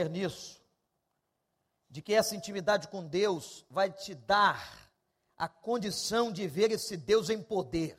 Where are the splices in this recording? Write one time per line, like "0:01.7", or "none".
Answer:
none

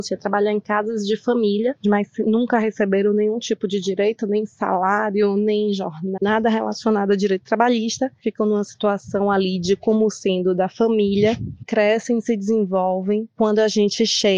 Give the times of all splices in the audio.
0:06.2

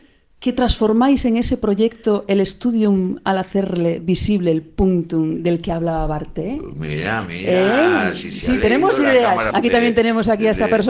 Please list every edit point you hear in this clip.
0:09.5

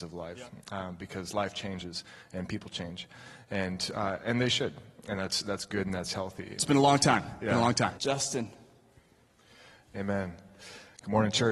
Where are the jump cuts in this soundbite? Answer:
0:06.6
0:07.9

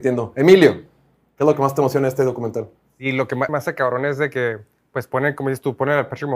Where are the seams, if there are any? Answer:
0:03.5

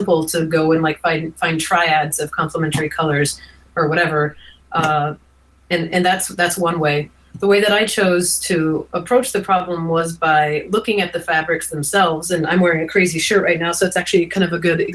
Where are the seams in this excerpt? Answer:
none

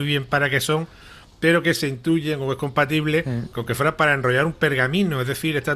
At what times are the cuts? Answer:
none

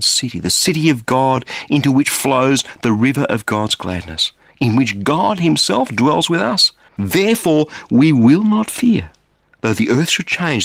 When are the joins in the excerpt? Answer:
0:06.9

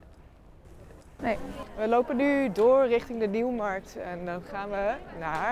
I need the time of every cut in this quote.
0:01.2

